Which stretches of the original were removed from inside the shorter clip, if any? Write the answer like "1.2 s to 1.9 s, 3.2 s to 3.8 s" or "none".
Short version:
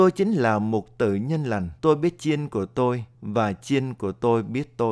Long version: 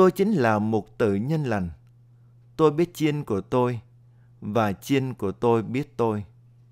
1.8 s to 2.5 s, 3.9 s to 4.3 s

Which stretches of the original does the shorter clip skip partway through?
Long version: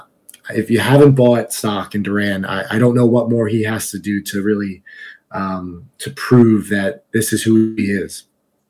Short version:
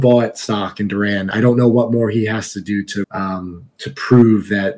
2.5 s to 2.7 s, 4.4 s to 5.2 s

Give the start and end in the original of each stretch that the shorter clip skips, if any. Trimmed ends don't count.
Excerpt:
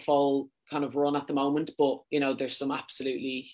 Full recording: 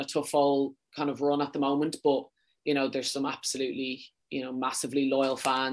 2.3 s to 2.6 s

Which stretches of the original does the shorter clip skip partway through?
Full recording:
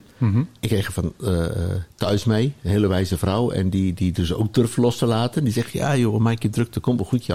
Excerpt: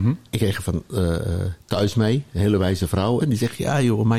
3.5 s to 5.4 s

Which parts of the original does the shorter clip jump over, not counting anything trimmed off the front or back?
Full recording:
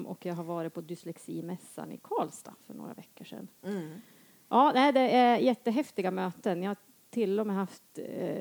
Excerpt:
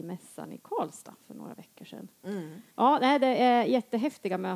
4.1 s to 4.4 s

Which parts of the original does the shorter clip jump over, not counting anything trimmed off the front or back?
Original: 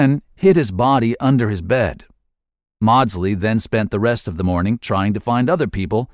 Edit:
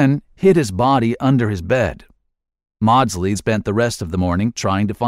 3.4 s to 3.6 s

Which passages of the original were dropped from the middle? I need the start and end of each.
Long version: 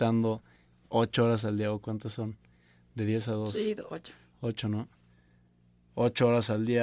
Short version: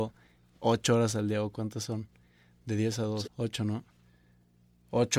3.5 s to 4.3 s

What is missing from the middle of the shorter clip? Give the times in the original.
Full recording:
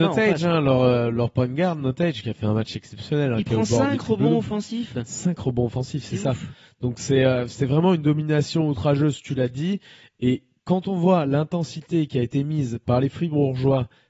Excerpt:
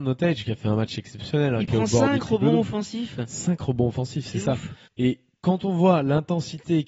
6.6 s to 10.1 s

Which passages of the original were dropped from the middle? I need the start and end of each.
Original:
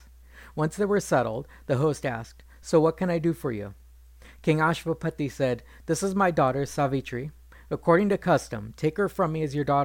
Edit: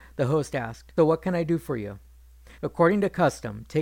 2.5 s to 2.7 s, 4.3 s to 7.7 s

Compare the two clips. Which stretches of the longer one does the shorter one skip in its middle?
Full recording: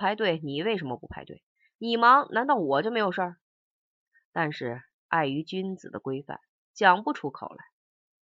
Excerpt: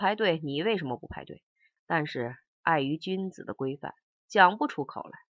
1.8 s to 4.2 s

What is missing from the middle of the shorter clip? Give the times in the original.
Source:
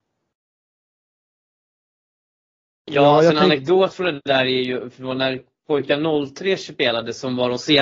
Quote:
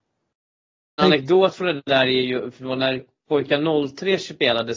1.0 s to 3.4 s

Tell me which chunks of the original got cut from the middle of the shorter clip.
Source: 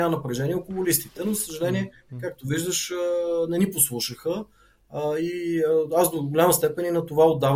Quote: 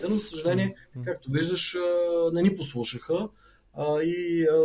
none

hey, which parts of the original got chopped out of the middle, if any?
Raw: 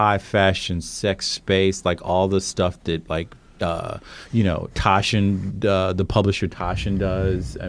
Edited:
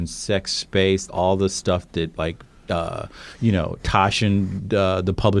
1.8 s to 2.0 s

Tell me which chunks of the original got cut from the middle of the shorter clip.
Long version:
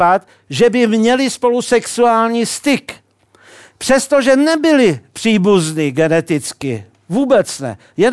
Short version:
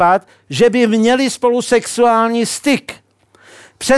none

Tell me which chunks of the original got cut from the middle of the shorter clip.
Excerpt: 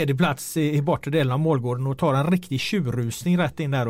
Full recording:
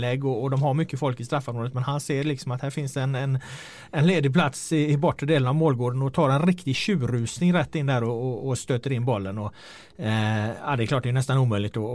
none

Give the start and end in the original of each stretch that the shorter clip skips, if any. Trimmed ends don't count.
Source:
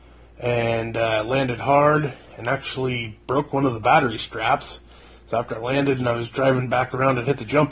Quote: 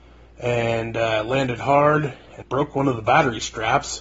2.4 s to 3.2 s

